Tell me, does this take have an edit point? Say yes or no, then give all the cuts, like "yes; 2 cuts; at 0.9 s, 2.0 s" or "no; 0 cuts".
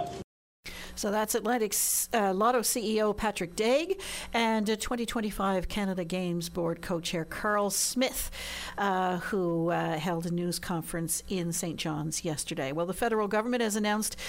no; 0 cuts